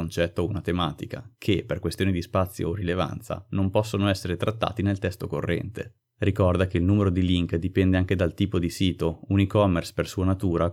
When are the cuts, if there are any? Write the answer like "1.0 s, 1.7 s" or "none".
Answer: none